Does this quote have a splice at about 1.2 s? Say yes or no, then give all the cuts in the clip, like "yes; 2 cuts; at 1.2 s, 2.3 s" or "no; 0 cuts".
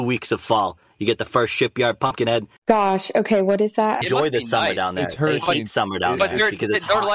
no; 2 cuts; at 2.6 s, 4.0 s